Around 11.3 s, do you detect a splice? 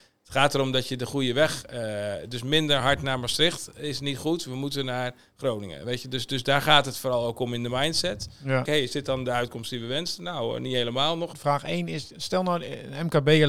yes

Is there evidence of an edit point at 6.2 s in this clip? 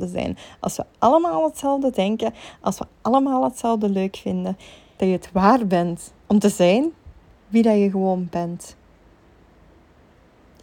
yes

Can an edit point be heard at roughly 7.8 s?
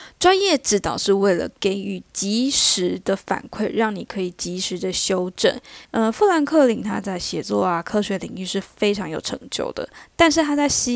no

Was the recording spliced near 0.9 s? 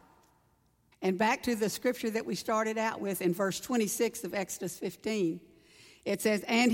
yes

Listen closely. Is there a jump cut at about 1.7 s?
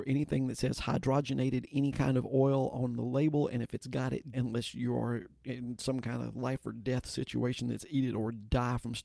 no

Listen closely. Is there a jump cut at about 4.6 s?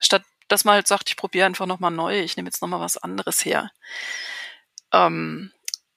no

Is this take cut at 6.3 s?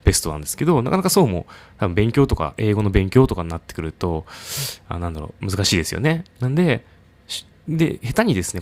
yes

